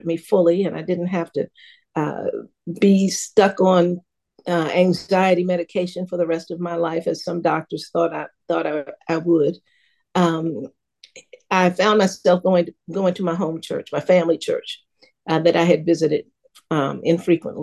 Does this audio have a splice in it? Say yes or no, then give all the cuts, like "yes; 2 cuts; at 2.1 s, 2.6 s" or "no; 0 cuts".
no; 0 cuts